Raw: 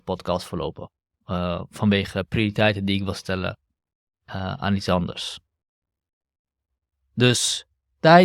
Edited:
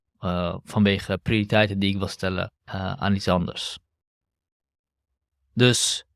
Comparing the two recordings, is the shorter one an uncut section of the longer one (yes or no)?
no